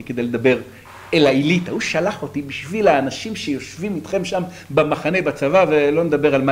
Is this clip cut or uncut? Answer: uncut